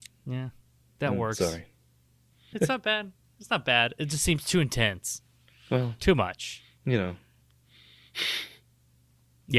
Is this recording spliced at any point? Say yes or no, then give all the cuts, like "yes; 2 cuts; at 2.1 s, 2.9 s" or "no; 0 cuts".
yes; 1 cut; at 2.5 s